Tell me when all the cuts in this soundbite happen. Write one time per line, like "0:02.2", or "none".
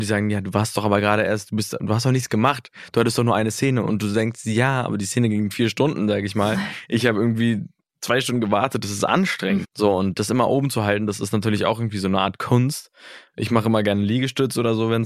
0:09.6